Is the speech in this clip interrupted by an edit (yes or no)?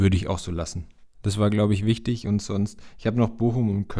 yes